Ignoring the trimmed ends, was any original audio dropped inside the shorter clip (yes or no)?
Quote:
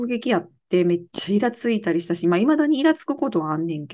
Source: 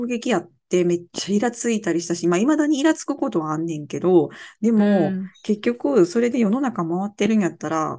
no